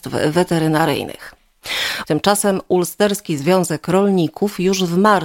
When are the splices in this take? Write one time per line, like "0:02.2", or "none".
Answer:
0:02.0